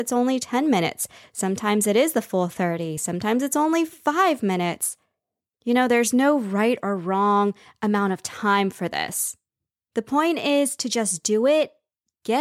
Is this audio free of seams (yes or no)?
yes